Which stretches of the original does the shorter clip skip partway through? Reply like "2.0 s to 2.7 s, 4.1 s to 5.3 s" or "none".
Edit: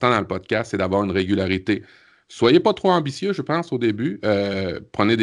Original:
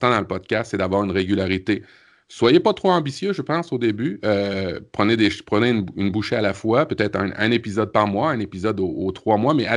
none